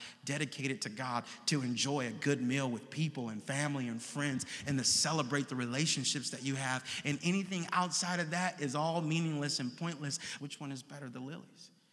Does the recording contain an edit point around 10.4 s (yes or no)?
yes